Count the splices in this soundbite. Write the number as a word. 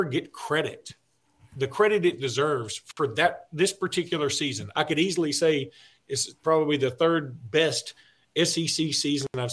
one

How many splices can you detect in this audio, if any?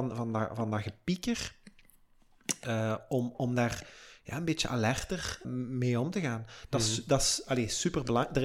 one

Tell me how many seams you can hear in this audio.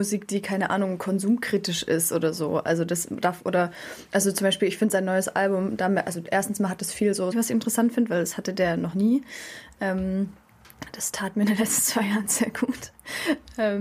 one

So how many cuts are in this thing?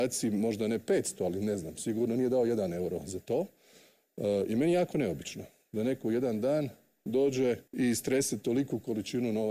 one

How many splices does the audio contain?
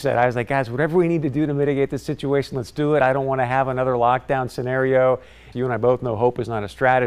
one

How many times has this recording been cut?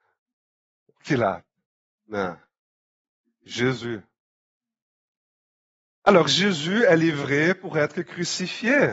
one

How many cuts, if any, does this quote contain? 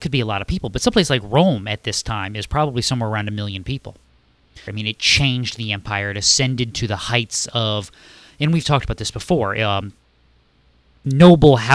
one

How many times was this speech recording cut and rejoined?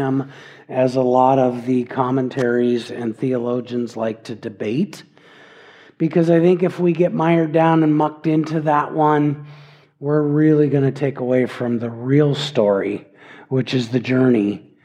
zero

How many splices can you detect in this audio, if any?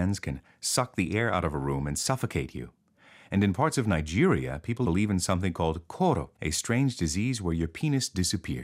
two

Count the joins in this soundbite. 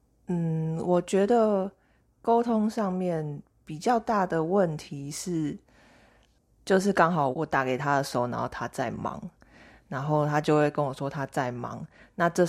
one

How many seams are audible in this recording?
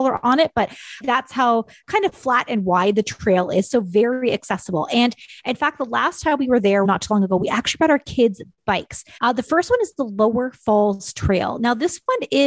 three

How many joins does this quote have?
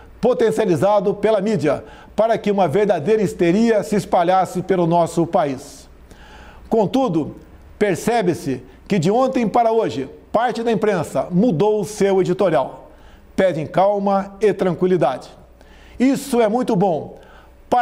zero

